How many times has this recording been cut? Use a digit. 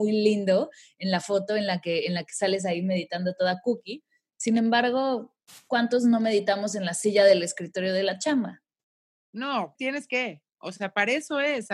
1